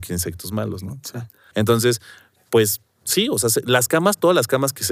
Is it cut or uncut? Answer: cut